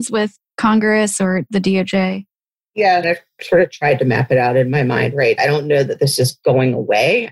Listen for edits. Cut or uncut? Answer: cut